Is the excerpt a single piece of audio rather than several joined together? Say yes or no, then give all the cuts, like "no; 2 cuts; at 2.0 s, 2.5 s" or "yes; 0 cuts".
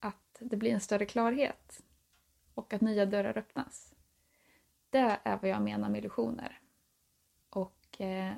yes; 0 cuts